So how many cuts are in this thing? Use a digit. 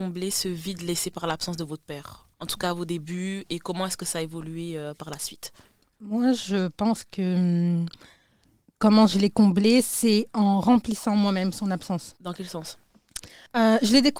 1